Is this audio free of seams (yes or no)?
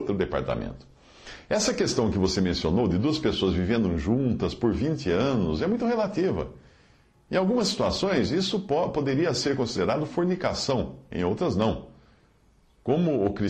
yes